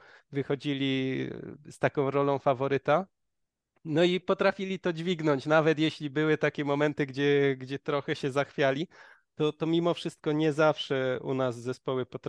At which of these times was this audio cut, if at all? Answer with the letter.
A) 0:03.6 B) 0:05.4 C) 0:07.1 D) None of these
D